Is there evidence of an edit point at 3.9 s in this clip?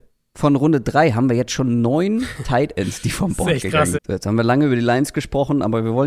yes; 1 cut; at 3.9 s

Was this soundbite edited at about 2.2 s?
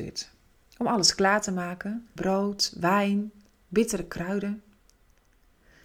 yes; 1 cut; at 2.2 s

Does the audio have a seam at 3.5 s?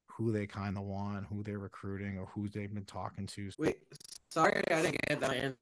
yes; 1 cut; at 3.5 s

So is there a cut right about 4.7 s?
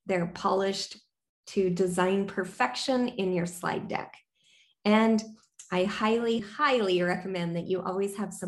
no; 1 cut; at 6.4 s

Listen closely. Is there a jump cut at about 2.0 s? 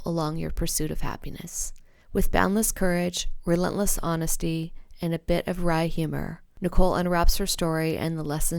yes; 1 cut; at 2.0 s

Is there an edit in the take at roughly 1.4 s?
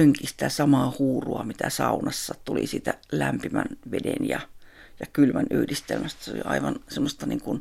no; 0 cuts

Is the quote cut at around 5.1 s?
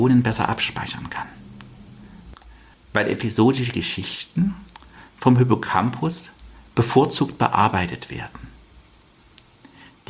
no; 1 cut; at 2.7 s

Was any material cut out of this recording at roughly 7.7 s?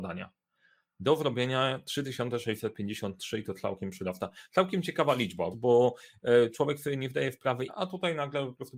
yes; 2 cuts; at 5.5 s, 7.7 s

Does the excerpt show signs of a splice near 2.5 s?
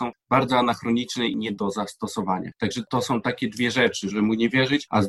no; 1 cut; at 4.1 s

